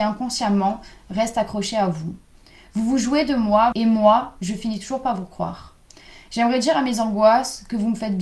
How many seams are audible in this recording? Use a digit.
1